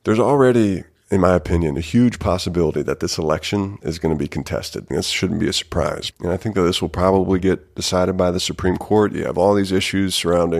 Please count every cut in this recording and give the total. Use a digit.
2